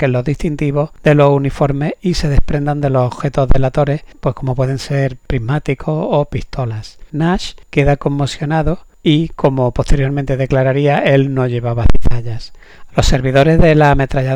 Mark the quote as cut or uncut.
cut